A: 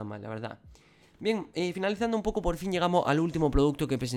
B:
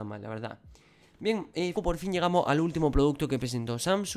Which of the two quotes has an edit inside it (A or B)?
B